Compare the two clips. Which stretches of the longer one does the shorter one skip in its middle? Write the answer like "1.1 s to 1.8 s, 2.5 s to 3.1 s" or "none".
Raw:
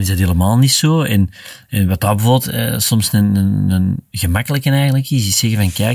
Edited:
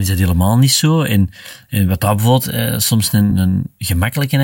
3.3 s to 3.6 s